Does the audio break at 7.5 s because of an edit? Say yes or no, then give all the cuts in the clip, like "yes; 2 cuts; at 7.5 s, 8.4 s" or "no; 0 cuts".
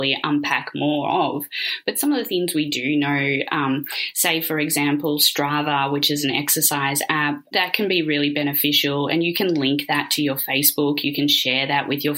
yes; 1 cut; at 7.5 s